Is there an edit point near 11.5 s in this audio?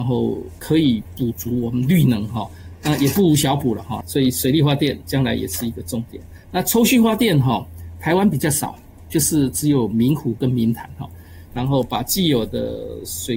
yes; 2 cuts; at 4.0 s, 11.5 s

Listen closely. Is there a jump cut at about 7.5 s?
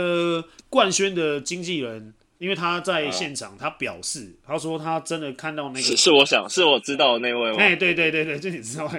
no; 0 cuts

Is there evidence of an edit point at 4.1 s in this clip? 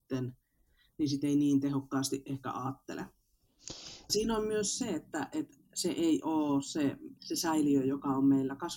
yes; 2 cuts; at 4.1 s, 7.2 s

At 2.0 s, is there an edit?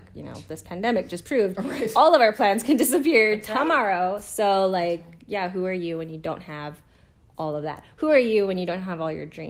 no; 0 cuts

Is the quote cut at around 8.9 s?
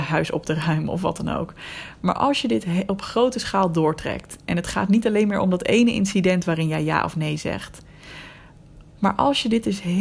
yes; 1 cut; at 8.9 s

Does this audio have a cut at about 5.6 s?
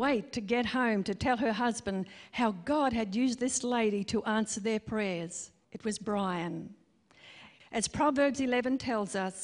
yes; 2 cuts; at 5.6 s, 7.6 s

